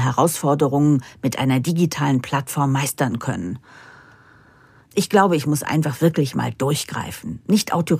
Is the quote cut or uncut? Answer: uncut